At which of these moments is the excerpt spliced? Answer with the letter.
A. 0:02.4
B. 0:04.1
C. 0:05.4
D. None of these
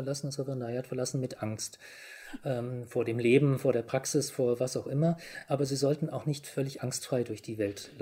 D